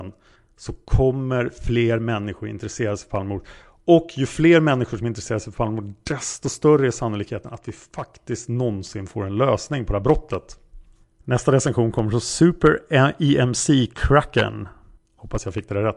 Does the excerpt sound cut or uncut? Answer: uncut